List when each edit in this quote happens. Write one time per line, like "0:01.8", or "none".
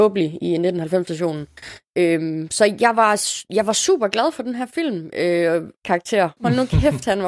0:05.8